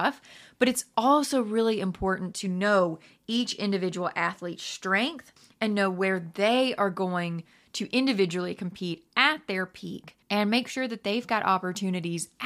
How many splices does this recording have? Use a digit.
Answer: 1